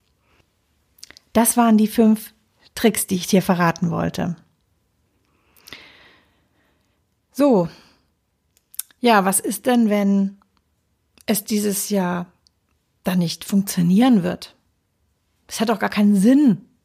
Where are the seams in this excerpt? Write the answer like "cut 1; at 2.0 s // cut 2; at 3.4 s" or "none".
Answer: none